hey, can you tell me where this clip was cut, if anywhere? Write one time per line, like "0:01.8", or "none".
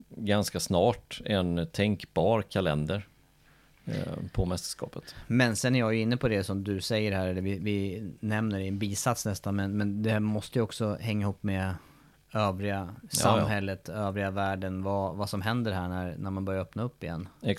none